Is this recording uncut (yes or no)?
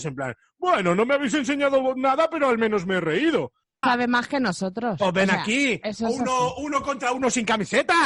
no